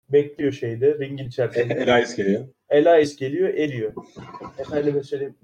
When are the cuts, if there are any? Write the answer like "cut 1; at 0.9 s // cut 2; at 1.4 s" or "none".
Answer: cut 1; at 2.7 s